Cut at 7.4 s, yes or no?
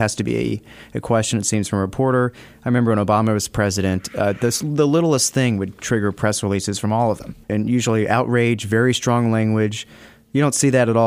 yes